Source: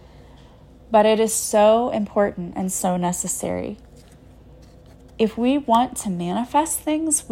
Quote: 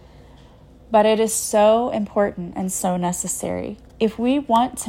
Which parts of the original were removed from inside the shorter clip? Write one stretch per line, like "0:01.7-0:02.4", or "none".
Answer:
0:03.9-0:05.1